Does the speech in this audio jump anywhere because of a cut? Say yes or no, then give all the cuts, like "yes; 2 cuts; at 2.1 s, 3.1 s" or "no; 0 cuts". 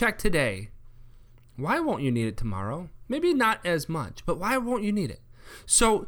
no; 0 cuts